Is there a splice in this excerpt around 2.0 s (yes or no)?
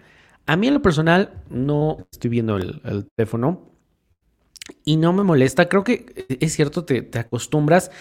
yes